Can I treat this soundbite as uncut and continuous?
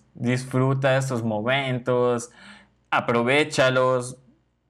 yes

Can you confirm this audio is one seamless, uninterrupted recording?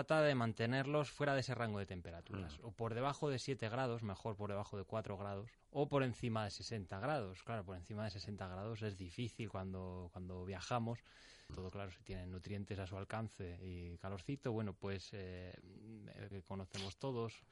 no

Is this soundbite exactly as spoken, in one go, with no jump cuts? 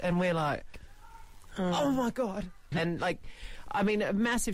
no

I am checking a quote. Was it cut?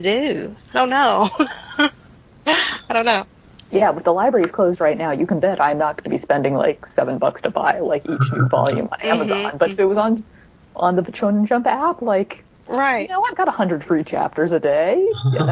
no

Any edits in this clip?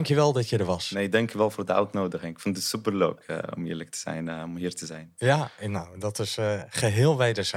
no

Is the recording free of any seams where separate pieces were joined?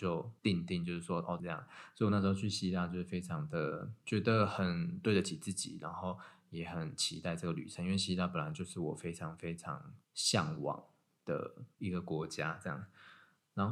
no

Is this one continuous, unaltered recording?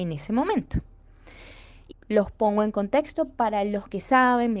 no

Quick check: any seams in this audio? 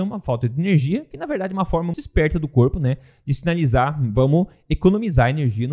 yes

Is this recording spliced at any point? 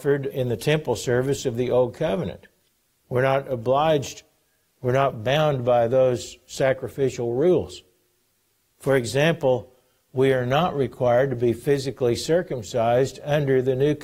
yes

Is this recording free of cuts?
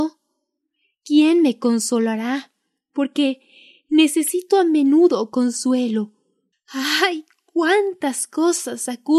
no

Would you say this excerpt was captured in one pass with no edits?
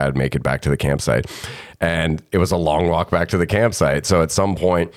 yes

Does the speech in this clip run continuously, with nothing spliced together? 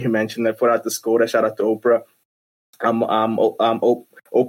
yes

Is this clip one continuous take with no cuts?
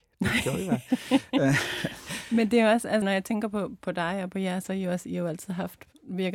no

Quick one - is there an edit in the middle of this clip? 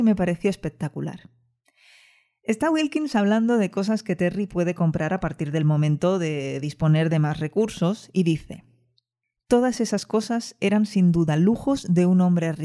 no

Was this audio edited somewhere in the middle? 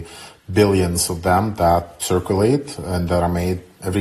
yes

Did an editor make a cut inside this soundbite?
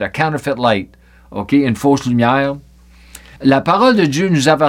yes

